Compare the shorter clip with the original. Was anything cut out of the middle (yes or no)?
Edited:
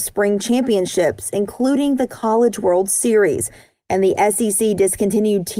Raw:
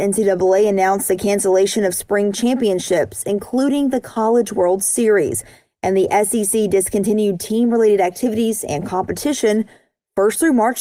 no